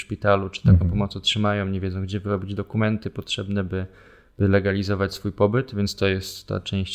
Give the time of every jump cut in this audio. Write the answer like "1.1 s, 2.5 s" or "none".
none